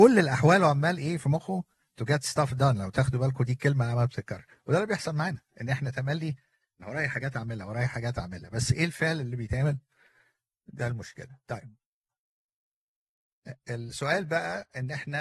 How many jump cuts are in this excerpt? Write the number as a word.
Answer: zero